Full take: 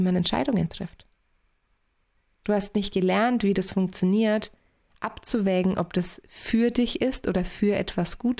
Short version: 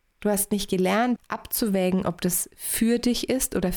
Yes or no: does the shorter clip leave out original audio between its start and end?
yes